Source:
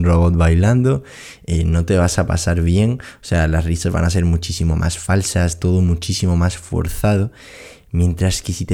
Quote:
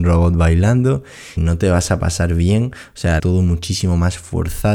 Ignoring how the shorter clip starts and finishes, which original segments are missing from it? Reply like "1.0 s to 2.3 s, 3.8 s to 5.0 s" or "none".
1.4 s to 1.6 s, 3.5 s to 5.6 s

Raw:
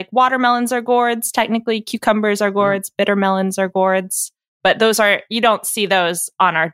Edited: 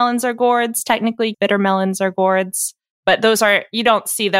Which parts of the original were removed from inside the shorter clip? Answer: 1.8 s to 2.9 s

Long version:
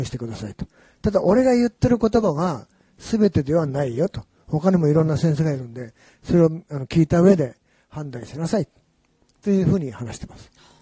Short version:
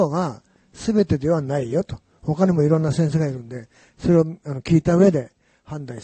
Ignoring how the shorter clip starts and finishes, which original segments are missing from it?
none

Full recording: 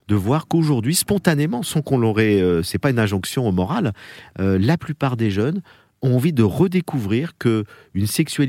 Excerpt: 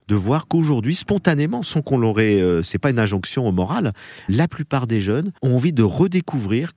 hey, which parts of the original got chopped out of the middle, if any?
4.3 s to 4.6 s, 5.7 s to 6.0 s

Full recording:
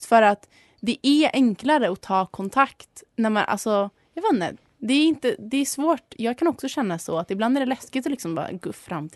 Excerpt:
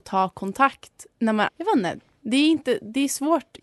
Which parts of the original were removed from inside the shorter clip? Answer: 3.5 s to 4.1 s

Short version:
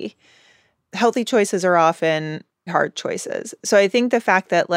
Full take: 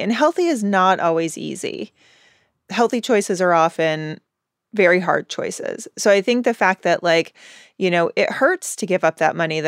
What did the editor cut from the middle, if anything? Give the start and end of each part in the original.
4.4 s to 5.0 s

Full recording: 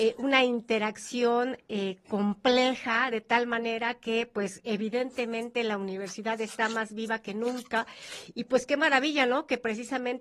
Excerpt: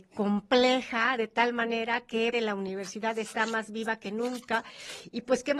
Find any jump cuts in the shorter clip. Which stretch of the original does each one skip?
4.3 s to 5.6 s

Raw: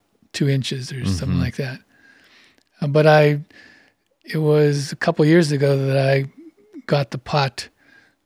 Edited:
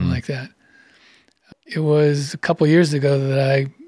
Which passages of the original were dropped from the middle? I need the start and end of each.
2.8 s to 4.1 s

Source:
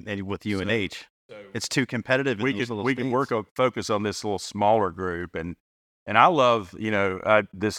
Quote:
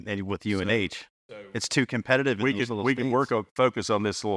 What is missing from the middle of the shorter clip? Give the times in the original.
none

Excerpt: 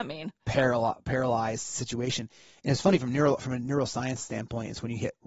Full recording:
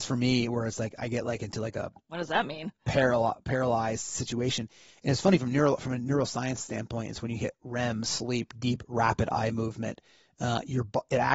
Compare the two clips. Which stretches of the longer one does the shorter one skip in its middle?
none

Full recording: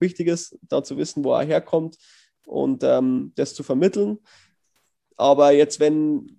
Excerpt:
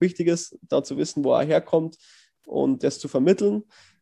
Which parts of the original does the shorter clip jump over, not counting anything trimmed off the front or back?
2.8 s to 3.3 s

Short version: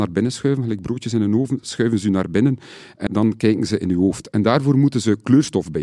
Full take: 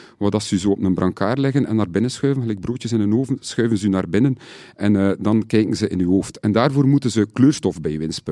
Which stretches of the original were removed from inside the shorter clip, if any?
4.9 s to 5.2 s

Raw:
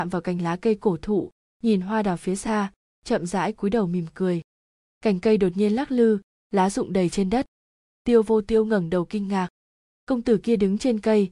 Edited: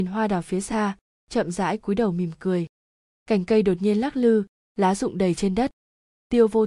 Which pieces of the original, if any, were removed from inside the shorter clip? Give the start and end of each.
none

